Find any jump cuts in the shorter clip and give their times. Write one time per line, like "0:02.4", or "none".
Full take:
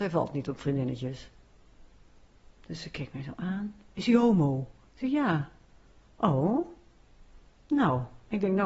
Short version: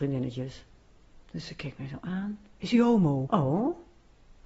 0:01.3
0:03.3